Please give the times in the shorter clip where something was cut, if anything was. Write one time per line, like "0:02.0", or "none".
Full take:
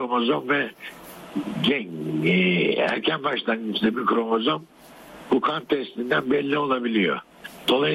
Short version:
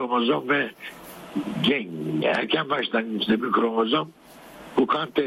0:02.2